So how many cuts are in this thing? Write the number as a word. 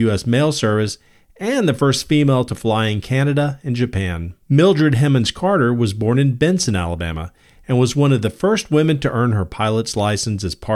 one